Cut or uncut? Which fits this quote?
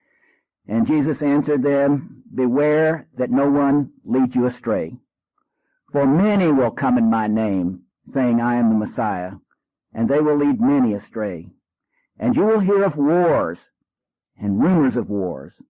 uncut